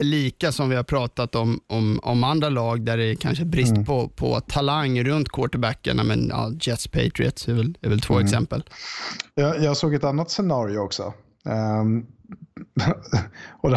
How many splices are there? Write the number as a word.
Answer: zero